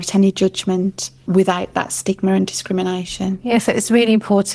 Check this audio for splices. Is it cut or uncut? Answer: cut